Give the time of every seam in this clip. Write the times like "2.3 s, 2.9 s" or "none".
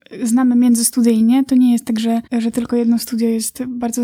2.3 s